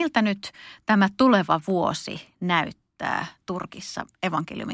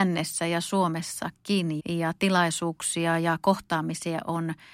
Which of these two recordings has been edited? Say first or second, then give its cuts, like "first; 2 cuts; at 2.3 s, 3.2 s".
second; 1 cut; at 1.8 s